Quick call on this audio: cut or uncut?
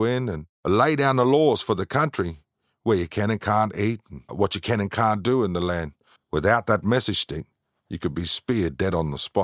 cut